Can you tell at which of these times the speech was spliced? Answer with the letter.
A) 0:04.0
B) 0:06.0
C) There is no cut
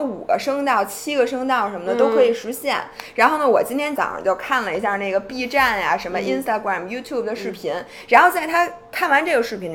A